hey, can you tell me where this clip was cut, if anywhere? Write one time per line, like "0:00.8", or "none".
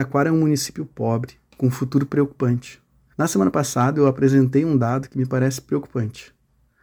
0:03.1